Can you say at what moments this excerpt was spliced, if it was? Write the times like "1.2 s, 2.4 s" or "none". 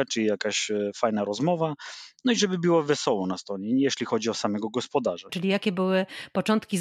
5.3 s